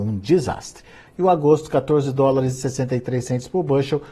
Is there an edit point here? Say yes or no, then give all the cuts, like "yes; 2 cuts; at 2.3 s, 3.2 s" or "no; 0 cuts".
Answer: yes; 1 cut; at 1.1 s